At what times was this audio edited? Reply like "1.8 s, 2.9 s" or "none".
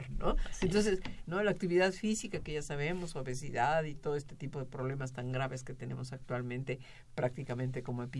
1.2 s

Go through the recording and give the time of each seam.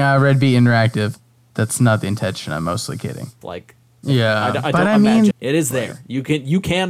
3.4 s, 5.3 s

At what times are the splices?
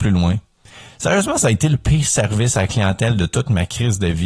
none

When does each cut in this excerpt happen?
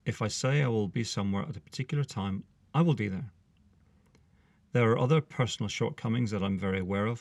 3.0 s

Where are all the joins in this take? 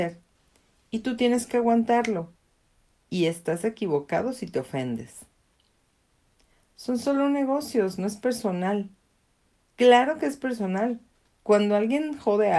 none

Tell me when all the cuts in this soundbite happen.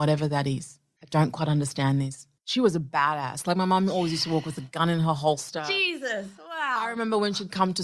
2.4 s

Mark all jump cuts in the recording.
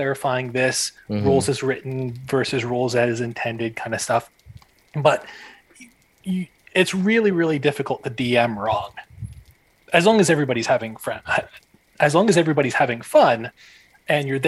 none

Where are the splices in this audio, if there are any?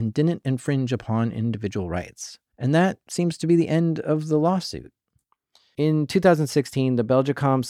none

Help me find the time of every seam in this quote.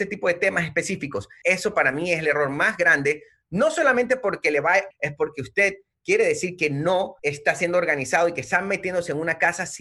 1.4 s, 4.9 s, 7.2 s

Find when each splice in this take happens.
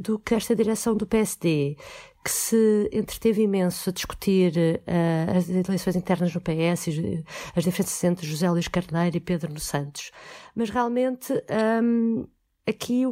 none

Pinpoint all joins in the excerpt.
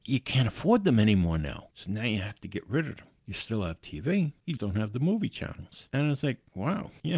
4.6 s, 5.9 s

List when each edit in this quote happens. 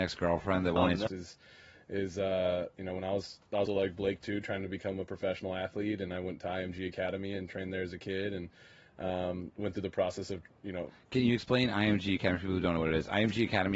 1.1 s, 3.7 s

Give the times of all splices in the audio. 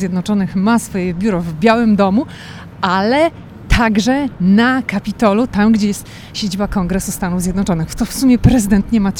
none

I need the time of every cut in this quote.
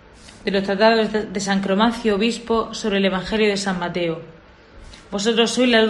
none

